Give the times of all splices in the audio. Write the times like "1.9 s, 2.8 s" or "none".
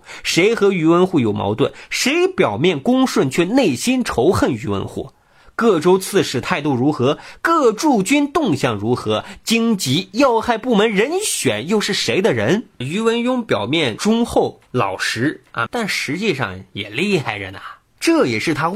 12.8 s, 15.7 s